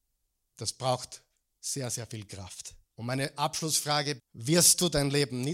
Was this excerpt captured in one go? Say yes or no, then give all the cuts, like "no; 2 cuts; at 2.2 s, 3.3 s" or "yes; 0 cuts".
no; 2 cuts; at 2.8 s, 4.2 s